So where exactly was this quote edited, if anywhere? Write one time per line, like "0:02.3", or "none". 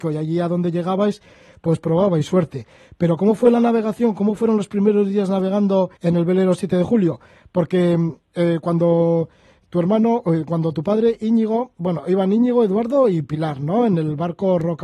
0:06.0